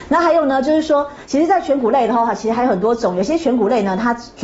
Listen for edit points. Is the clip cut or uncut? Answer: uncut